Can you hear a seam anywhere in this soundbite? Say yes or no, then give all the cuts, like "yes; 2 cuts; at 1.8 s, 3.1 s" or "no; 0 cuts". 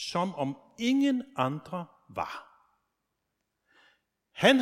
no; 0 cuts